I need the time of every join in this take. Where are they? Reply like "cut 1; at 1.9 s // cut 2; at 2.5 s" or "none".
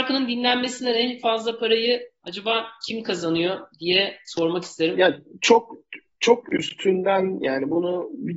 none